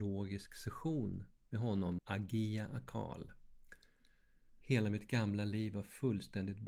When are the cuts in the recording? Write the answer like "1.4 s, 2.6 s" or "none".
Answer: 2.0 s, 4.6 s